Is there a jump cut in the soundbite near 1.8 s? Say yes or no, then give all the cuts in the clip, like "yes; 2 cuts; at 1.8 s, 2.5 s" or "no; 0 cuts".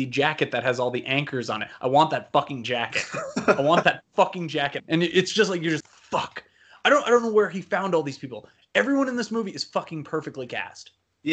no; 2 cuts; at 4.8 s, 5.8 s